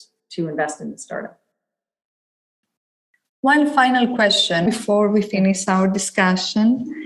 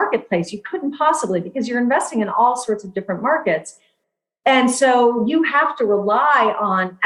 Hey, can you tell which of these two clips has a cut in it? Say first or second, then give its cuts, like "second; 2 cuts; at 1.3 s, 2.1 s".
first; 1 cut; at 4.7 s